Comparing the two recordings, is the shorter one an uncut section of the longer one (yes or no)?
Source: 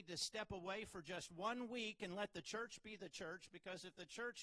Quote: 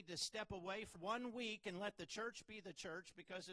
no